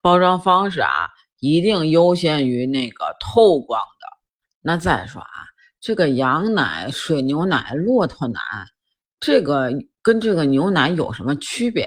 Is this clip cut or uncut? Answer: uncut